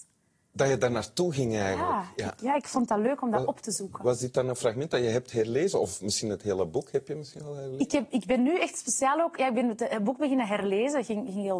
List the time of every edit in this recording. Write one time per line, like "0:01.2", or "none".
none